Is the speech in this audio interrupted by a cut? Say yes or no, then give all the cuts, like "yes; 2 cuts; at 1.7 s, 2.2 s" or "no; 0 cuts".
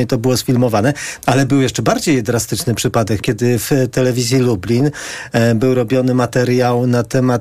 yes; 2 cuts; at 1.2 s, 3.2 s